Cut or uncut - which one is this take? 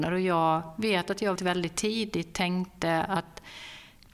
cut